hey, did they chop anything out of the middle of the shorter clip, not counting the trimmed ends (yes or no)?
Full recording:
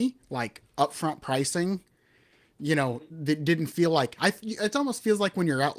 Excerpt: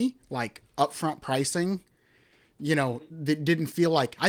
no